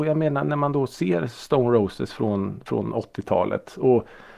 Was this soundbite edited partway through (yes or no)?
no